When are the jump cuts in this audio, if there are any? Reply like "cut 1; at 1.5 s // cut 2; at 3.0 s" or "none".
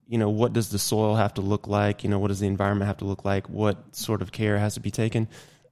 none

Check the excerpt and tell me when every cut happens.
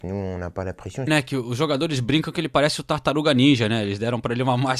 cut 1; at 1.1 s

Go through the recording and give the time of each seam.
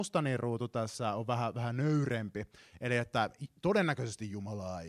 none

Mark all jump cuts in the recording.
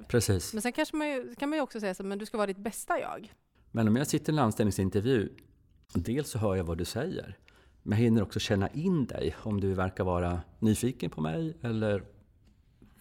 cut 1; at 3.5 s

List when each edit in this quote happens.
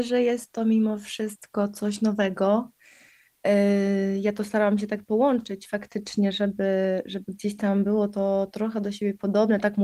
none

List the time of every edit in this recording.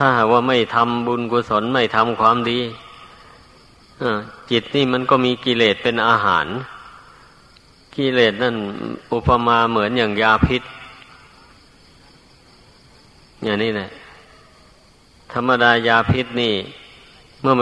none

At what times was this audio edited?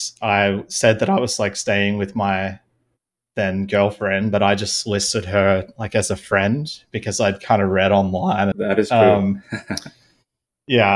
cut 1; at 8.5 s

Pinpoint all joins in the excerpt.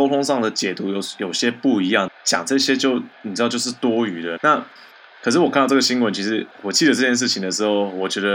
cut 1; at 2.1 s // cut 2; at 4.4 s // cut 3; at 6.5 s

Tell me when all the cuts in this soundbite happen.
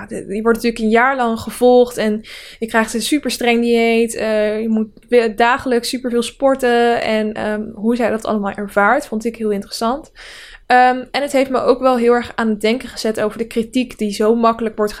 none

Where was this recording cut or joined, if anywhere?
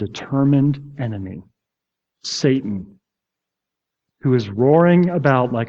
none

